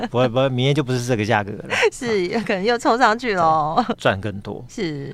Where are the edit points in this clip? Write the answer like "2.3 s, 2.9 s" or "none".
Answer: 3.9 s